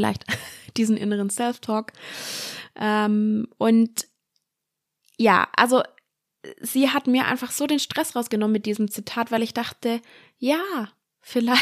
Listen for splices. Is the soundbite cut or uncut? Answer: uncut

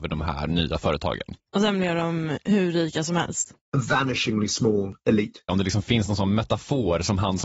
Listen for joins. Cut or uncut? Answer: cut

